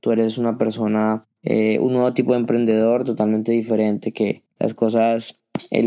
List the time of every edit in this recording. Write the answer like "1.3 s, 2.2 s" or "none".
none